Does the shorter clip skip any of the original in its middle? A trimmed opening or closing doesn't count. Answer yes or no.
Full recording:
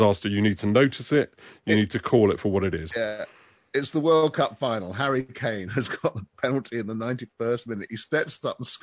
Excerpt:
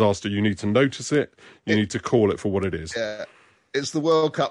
no